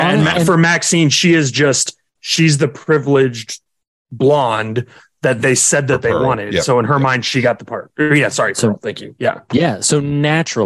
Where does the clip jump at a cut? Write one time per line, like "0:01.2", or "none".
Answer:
none